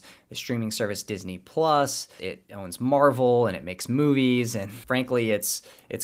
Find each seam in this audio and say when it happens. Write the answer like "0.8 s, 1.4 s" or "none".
2.2 s, 4.8 s